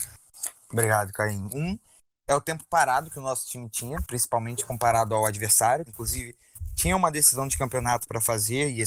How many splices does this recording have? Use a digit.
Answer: 2